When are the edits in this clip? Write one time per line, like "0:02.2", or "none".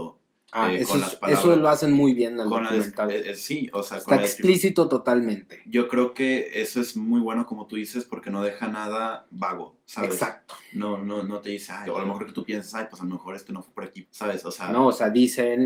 0:11.9
0:14.0